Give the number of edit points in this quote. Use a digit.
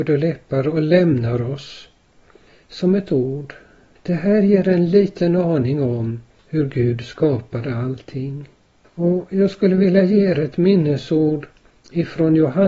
2